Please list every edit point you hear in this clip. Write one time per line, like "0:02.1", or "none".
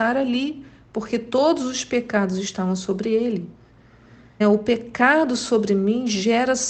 0:04.4